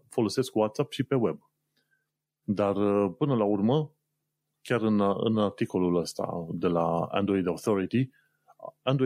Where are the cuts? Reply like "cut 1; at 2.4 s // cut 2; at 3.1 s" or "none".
cut 1; at 2.4 s